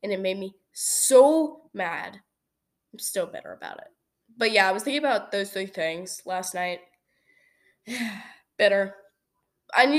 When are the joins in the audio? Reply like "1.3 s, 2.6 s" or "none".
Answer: none